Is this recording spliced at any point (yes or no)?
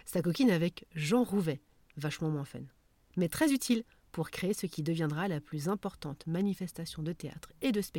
yes